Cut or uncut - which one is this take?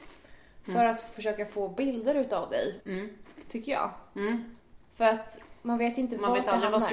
cut